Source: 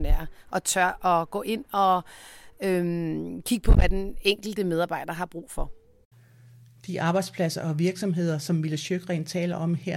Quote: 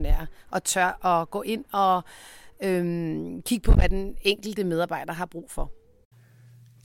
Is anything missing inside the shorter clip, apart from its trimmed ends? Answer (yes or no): no